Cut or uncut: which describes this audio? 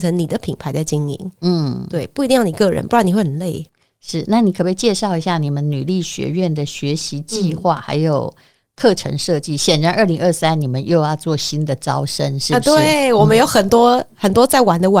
uncut